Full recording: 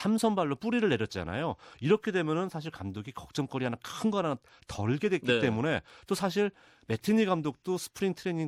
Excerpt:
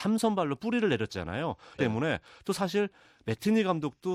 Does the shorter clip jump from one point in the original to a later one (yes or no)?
yes